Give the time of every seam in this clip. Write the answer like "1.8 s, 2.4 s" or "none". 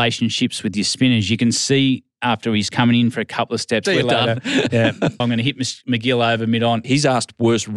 3.9 s, 5.2 s, 6.8 s